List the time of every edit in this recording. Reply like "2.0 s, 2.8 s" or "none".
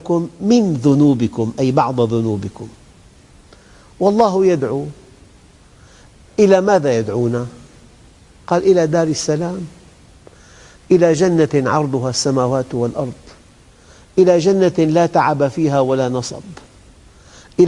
none